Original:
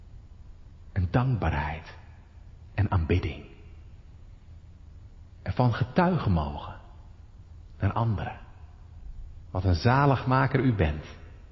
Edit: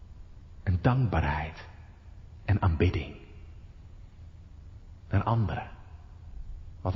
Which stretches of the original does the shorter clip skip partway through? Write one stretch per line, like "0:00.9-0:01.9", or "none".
0:05.4-0:07.8

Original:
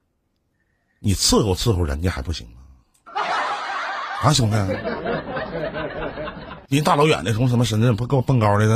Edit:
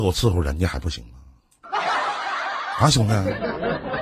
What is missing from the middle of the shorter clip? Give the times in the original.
none

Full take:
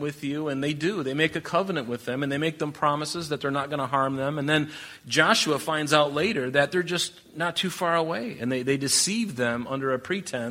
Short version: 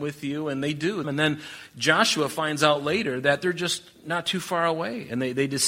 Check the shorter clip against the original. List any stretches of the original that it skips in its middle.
0:01.0-0:04.3

